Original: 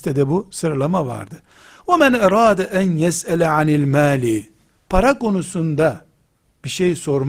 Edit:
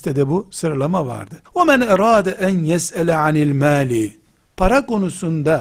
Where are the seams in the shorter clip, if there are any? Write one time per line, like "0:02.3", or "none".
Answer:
0:01.5